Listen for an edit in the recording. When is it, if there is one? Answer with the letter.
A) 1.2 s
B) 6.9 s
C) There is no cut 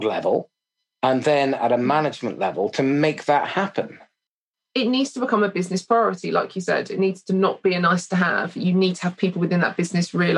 C